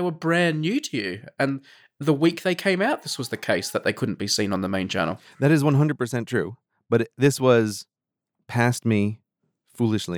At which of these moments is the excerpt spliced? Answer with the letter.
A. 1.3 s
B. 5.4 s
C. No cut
C